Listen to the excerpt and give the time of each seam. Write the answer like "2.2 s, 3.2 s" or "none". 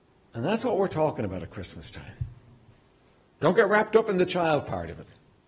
none